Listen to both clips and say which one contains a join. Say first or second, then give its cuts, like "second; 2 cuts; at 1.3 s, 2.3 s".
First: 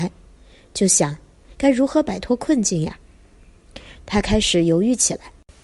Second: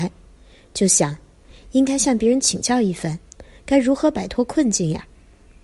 first; 2 cuts; at 1.5 s, 4.0 s